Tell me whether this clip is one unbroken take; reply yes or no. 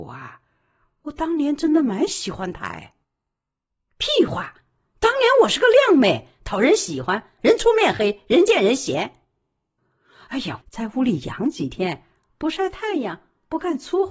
no